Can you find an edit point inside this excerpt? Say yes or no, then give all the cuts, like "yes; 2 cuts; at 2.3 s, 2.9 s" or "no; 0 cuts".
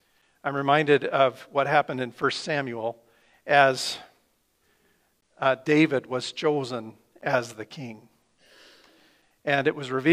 no; 0 cuts